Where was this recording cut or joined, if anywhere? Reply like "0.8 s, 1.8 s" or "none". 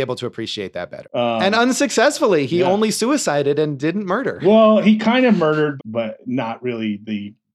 1.0 s, 5.8 s